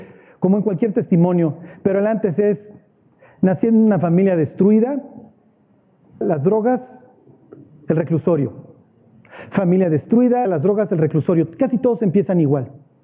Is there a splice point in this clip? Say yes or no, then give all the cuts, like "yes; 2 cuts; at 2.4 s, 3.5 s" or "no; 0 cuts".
yes; 2 cuts; at 6.2 s, 10.4 s